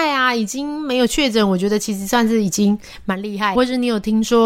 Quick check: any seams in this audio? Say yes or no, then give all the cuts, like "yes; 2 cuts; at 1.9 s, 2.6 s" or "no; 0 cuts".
yes; 1 cut; at 3.6 s